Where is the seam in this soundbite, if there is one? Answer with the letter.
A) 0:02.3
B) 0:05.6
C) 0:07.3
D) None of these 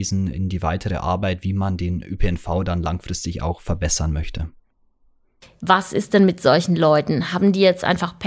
B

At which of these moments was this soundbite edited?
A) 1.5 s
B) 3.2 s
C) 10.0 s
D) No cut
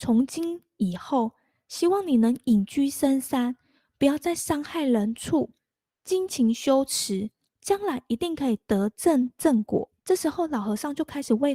C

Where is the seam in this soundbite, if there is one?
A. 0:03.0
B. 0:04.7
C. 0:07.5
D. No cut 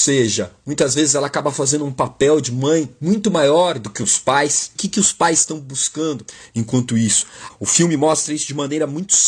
C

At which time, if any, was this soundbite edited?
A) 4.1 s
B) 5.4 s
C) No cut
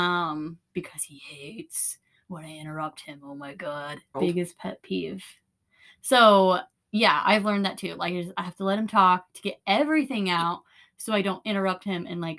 A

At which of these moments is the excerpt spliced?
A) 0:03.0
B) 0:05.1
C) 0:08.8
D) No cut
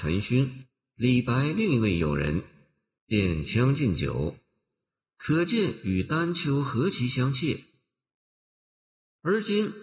A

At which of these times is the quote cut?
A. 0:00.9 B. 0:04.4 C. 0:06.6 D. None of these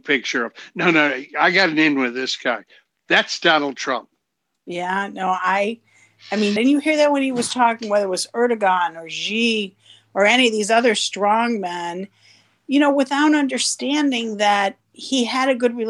C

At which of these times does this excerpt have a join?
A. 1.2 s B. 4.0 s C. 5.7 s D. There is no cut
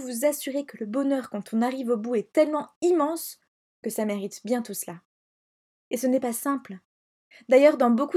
C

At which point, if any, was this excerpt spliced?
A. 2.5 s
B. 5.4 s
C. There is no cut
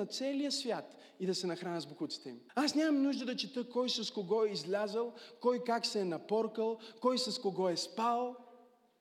A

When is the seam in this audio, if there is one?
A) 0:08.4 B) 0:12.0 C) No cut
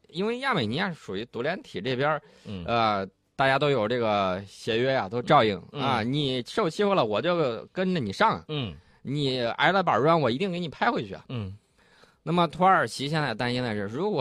C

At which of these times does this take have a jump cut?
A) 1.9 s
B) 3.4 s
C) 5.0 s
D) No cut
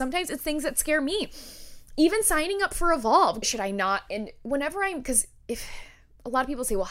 B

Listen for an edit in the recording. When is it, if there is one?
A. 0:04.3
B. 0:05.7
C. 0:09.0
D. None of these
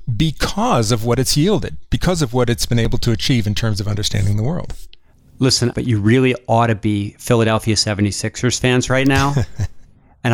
B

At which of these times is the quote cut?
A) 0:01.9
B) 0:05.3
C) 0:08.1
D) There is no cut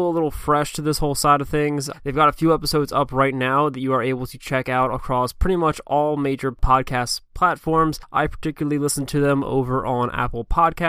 A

